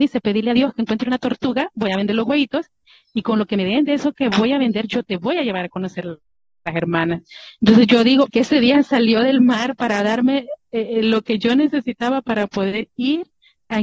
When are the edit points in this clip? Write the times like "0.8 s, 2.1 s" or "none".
8.3 s